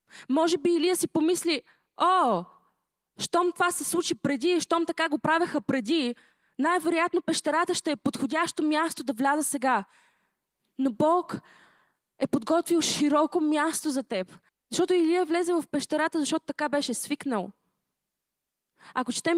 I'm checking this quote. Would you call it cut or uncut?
cut